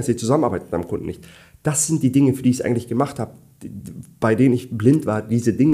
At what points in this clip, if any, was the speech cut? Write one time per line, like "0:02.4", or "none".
none